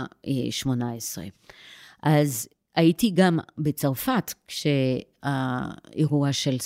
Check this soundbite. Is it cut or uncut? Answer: uncut